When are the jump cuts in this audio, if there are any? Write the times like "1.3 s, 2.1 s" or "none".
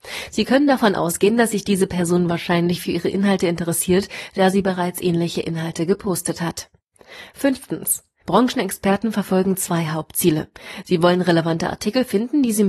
8.2 s